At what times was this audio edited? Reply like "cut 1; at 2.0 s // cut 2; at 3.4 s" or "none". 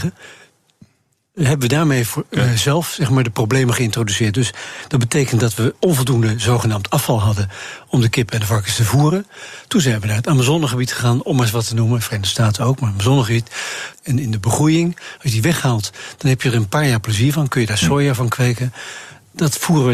cut 1; at 13.9 s